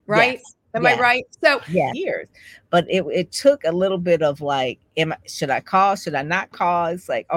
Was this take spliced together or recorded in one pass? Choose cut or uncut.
cut